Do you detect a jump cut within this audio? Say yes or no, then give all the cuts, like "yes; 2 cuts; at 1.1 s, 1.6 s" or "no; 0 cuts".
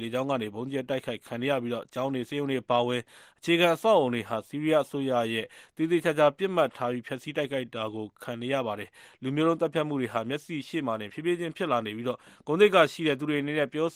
no; 0 cuts